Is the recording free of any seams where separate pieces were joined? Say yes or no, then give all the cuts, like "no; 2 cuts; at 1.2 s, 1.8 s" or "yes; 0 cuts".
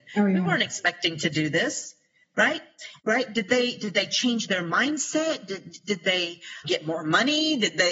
no; 2 cuts; at 3.0 s, 6.6 s